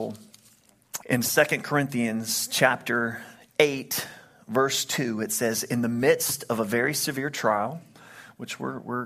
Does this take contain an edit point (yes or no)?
yes